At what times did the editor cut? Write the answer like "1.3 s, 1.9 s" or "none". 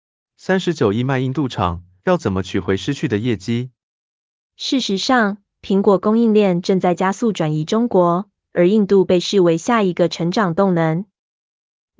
2.0 s, 4.5 s